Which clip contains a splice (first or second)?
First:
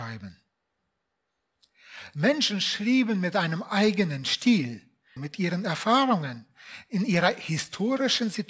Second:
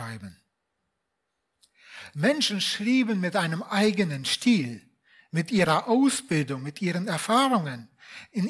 first